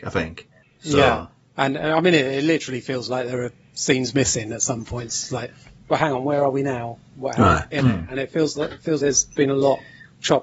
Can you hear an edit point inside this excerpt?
yes; 3 cuts; at 3.6 s, 7.7 s, 9.0 s

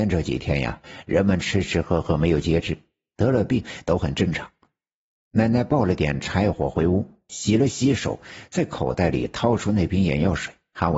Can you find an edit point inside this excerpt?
no; 0 cuts

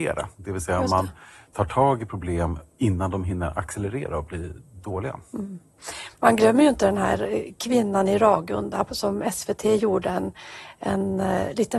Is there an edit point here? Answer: no; 0 cuts

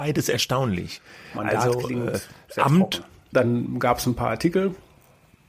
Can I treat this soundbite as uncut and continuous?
no; 1 cut; at 3.3 s

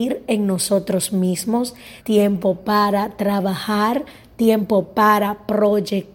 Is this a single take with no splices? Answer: no; 1 cut; at 2.0 s

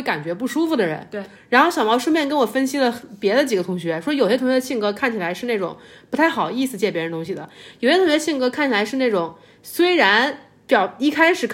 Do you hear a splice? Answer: no; 0 cuts

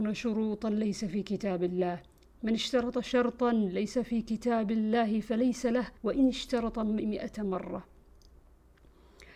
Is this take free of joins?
no; 1 cut; at 6.0 s

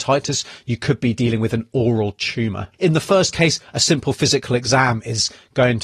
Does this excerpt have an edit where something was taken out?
yes; 1 cut; at 2.7 s

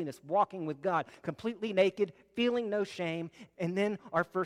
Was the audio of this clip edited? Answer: yes; 1 cut; at 3.5 s

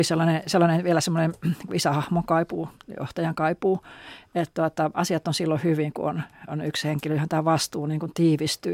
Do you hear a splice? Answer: no; 0 cuts

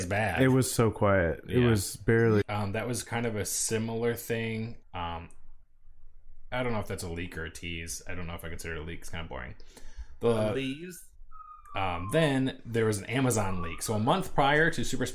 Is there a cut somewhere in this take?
yes; 2 cuts; at 2.4 s, 4.8 s

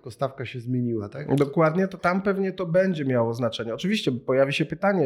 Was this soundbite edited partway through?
yes; 1 cut; at 2.0 s

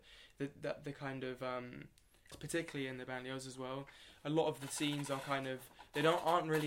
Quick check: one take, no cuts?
no; 1 cut; at 2.3 s

